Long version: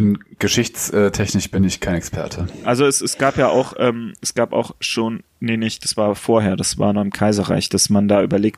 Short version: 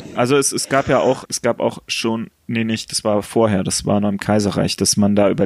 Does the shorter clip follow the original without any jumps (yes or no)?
no